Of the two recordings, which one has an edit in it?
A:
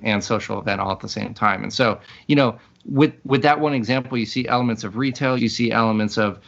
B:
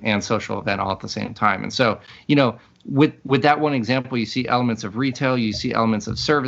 A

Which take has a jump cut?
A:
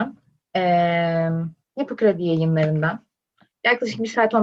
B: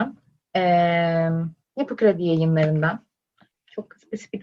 B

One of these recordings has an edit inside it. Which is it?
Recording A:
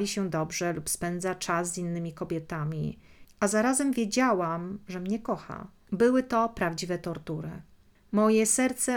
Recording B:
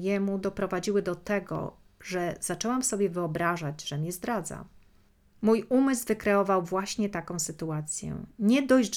A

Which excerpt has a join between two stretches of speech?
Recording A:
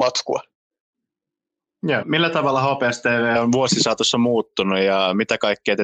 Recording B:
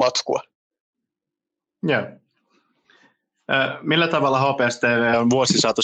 A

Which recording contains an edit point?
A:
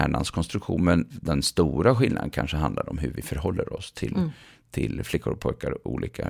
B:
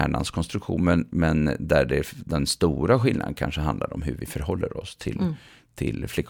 A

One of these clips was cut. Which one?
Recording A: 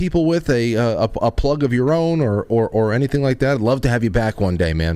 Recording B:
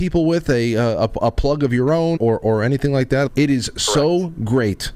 B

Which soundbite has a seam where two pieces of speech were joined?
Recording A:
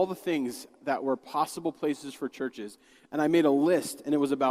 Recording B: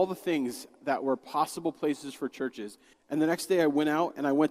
B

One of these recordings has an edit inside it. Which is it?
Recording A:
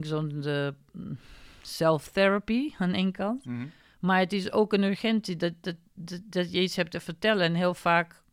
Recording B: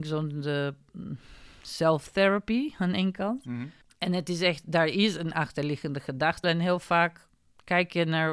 B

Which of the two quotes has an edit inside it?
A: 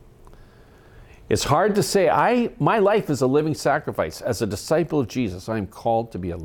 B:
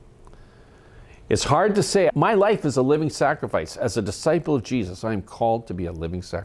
B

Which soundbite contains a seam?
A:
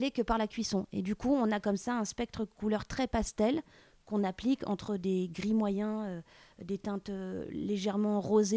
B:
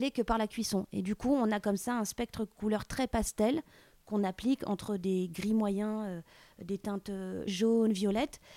B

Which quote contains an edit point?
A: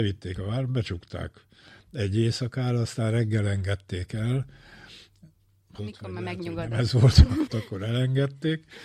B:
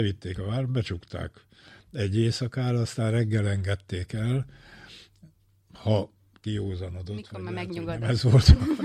A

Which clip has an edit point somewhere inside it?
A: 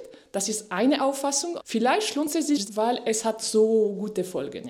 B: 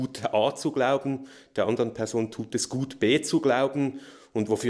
A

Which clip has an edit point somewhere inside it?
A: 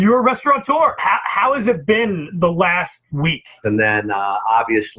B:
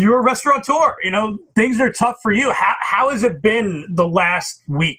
A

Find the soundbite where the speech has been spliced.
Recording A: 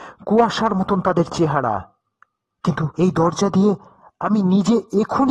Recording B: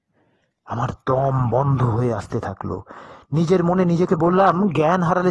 A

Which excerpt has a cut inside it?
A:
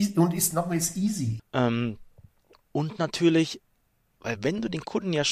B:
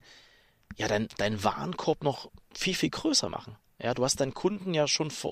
A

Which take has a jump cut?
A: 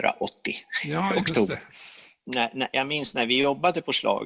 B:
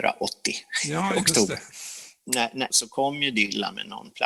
B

